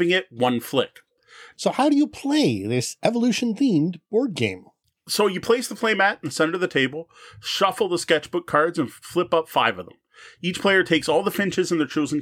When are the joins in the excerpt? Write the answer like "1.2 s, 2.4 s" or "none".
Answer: 1.5 s